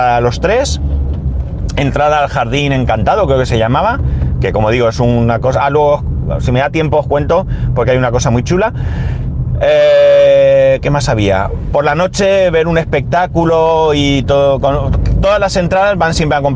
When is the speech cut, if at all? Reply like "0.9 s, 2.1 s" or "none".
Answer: none